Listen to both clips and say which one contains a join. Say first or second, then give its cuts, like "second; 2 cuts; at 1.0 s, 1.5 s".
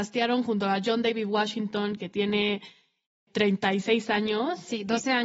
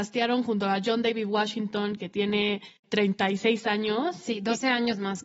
second; 1 cut; at 2.8 s